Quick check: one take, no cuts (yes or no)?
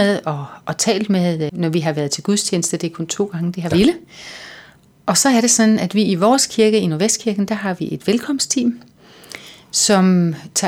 no